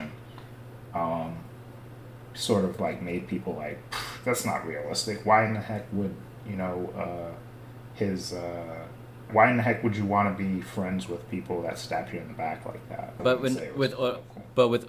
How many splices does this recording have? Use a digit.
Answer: 2